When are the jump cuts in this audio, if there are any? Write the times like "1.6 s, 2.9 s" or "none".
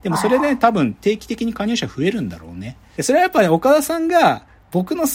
2.9 s